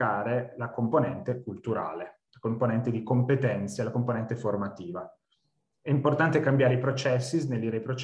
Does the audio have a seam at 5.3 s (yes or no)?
no